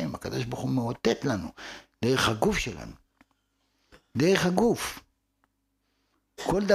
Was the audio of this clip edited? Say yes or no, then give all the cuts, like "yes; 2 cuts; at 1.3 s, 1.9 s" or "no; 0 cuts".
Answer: no; 0 cuts